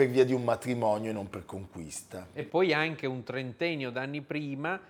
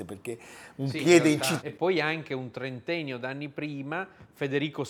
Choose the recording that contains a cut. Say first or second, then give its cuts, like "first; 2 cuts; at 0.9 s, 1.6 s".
second; 1 cut; at 1.6 s